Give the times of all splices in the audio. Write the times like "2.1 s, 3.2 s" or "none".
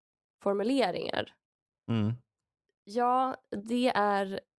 none